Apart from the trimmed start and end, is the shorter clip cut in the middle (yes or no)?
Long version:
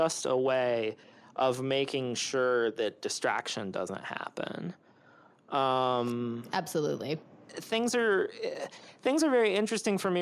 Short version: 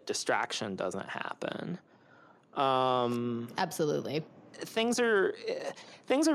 no